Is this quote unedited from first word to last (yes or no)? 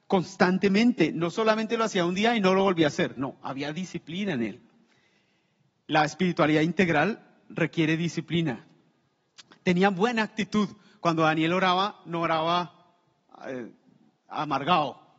yes